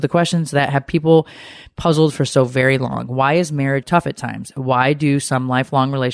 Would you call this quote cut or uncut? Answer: cut